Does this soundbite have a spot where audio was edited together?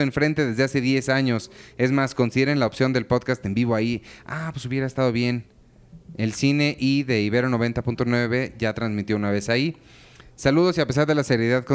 no; 0 cuts

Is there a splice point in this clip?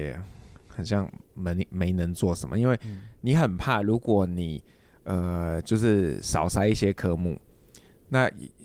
no; 0 cuts

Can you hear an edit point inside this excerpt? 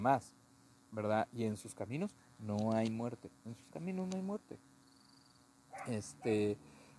no; 0 cuts

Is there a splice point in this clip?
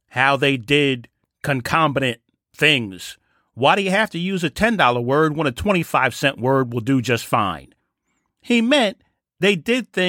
no; 0 cuts

